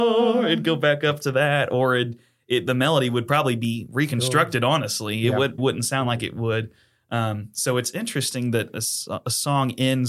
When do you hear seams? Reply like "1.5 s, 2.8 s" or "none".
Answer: 5.6 s